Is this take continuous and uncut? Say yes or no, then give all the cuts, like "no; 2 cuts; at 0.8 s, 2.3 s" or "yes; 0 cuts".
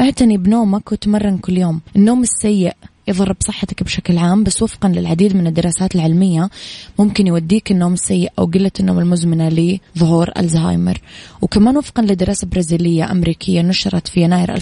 no; 2 cuts; at 1.9 s, 9.9 s